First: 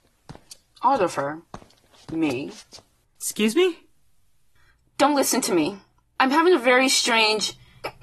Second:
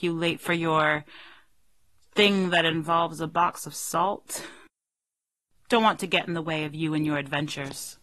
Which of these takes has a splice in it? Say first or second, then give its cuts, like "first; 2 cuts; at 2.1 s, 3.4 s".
first; 2 cuts; at 3.2 s, 6.0 s